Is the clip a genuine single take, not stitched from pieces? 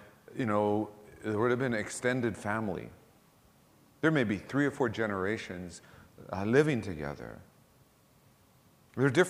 yes; 0 cuts

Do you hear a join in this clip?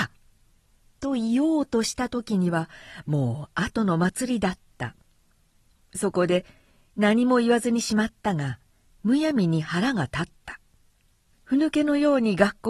no; 0 cuts

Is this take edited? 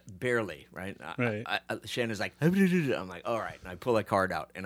no; 0 cuts

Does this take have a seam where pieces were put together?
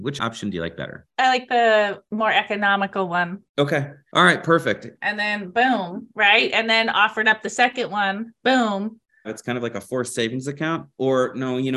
yes; 2 cuts; at 4.9 s, 9.2 s

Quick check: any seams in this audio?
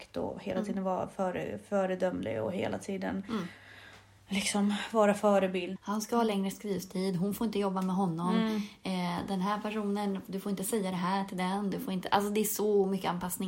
yes; 1 cut; at 5.8 s

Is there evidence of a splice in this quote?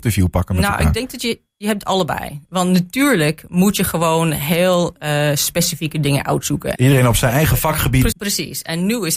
yes; 2 cuts; at 6.8 s, 8.1 s

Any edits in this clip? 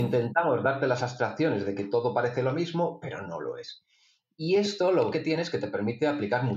yes; 1 cut; at 5.1 s

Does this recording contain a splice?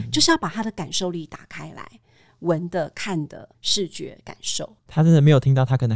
no; 0 cuts

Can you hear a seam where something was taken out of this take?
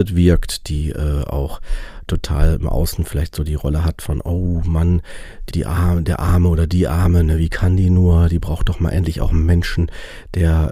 yes; 1 cut; at 5.5 s

